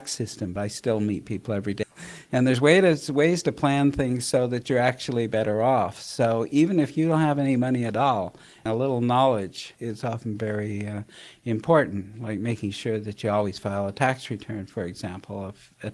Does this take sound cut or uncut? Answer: cut